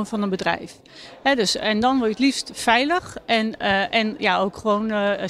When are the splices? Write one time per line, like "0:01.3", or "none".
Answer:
none

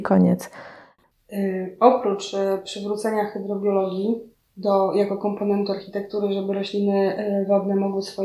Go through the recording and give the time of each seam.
0:01.1

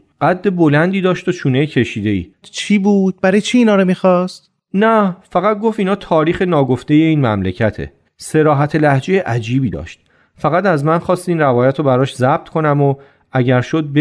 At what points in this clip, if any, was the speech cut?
0:02.4
0:08.0

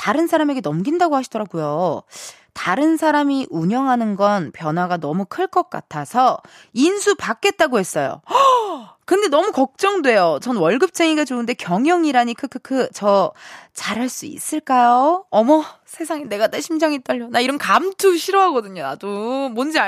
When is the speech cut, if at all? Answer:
none

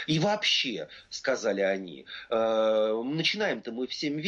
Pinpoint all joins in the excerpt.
none

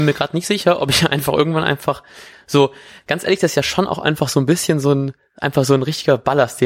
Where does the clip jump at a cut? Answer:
none

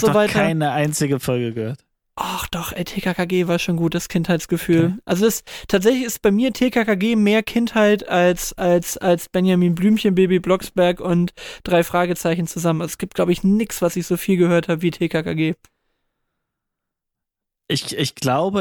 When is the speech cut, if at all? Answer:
none

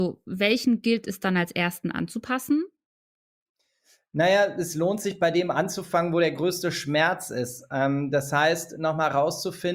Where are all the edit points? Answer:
none

